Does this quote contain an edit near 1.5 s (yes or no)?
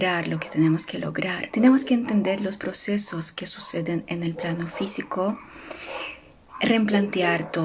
yes